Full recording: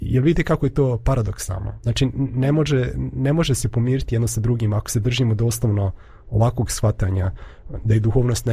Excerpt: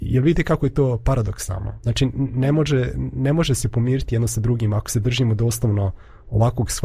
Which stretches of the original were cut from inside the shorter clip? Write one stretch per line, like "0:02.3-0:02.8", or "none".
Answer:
none